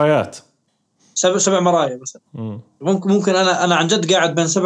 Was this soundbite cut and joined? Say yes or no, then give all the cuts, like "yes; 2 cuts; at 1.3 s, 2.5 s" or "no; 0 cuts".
no; 0 cuts